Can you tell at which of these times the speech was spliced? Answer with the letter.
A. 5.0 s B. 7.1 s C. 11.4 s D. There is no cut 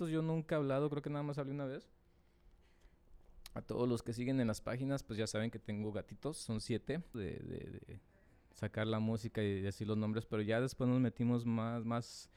B